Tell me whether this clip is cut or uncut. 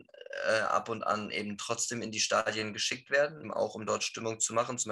cut